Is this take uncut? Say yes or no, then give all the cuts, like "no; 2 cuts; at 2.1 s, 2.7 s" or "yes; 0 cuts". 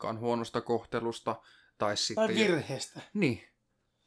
yes; 0 cuts